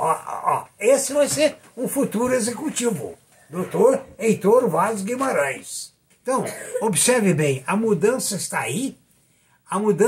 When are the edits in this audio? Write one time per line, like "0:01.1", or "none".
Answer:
0:06.1